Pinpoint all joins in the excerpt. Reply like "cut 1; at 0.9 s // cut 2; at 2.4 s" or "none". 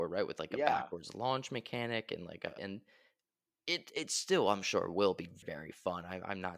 cut 1; at 2.6 s // cut 2; at 5.4 s

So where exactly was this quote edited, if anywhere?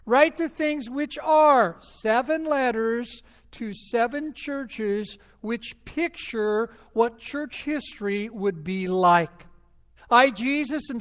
cut 1; at 10.0 s

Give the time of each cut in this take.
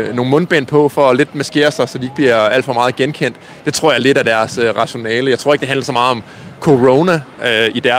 none

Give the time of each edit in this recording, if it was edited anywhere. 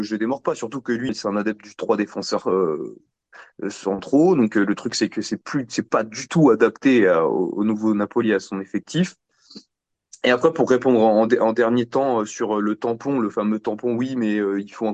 cut 1; at 1.1 s

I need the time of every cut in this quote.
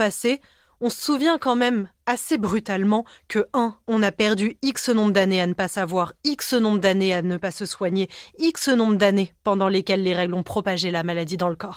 cut 1; at 3.8 s

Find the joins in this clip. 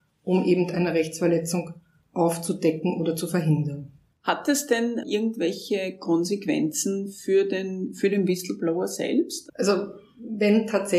cut 1; at 9.5 s

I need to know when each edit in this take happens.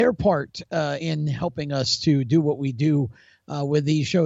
none

